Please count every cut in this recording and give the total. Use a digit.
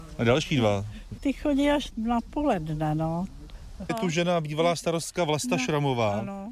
2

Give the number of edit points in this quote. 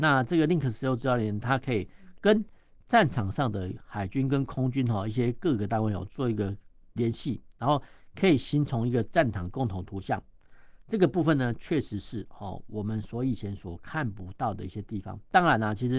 1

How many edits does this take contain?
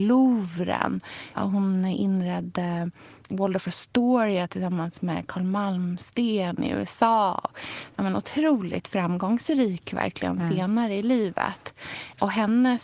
0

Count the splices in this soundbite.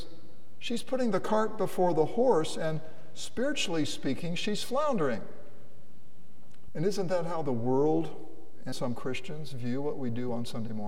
2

